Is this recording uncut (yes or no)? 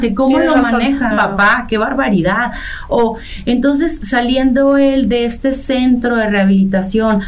no